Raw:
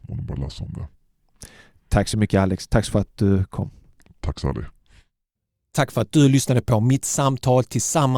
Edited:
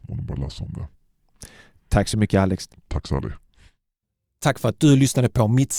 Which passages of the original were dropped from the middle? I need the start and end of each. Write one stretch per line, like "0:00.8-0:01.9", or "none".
0:02.7-0:04.0